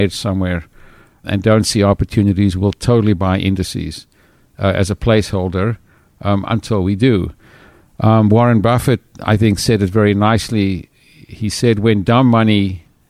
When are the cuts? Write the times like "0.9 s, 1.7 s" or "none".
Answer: none